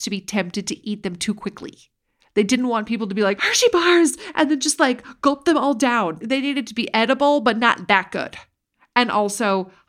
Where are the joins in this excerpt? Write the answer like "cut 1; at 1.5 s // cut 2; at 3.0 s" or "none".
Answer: cut 1; at 3.4 s